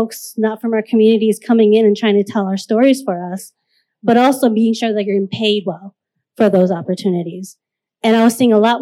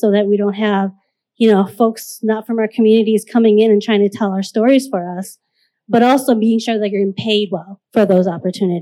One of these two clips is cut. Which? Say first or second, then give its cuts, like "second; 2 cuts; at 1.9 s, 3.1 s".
second; 1 cut; at 7.8 s